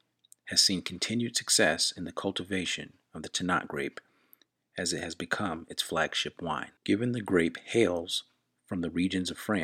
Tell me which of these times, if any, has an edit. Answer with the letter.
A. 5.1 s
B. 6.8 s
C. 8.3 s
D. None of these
B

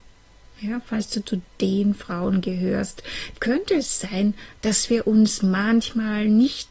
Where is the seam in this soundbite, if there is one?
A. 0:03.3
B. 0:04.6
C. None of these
A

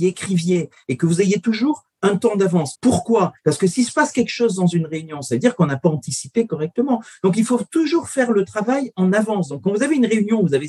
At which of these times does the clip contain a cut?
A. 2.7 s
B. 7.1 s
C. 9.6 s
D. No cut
A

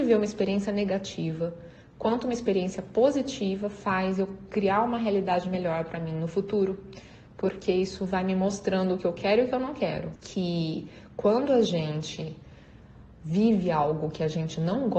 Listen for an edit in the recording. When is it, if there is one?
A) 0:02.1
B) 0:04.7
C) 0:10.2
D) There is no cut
C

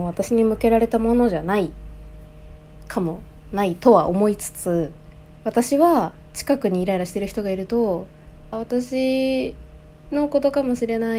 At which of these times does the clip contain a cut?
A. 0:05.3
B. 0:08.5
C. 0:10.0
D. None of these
B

